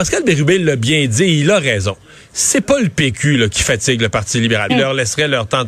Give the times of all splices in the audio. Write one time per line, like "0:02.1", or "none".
0:04.7